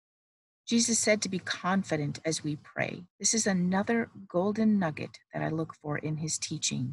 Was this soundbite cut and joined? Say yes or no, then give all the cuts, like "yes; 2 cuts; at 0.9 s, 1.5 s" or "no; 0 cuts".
yes; 1 cut; at 3.1 s